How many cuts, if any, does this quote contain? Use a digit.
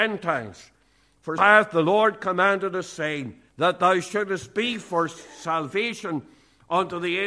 2